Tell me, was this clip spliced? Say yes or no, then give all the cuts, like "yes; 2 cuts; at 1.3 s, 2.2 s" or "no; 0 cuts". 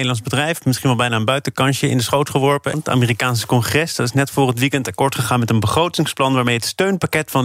yes; 1 cut; at 2.7 s